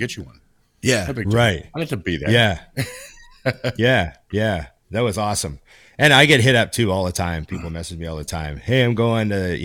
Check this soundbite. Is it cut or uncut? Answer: uncut